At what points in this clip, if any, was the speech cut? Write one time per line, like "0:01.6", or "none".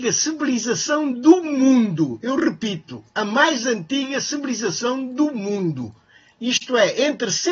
none